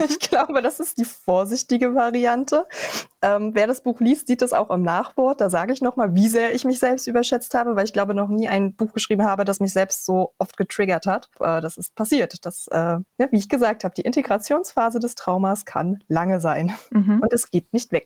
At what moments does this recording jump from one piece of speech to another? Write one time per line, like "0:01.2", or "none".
0:11.3
0:13.1